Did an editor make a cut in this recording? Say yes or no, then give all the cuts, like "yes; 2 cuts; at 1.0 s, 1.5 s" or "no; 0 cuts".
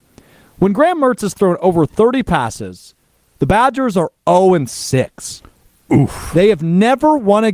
no; 0 cuts